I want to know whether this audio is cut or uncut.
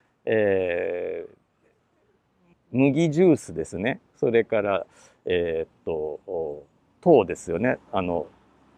cut